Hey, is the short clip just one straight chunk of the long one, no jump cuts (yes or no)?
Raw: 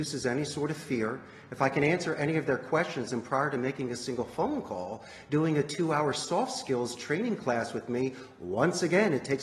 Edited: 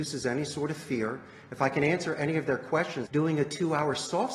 no